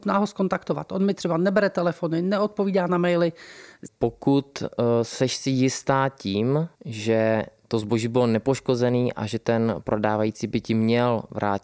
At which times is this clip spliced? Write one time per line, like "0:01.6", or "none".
0:03.9
0:06.8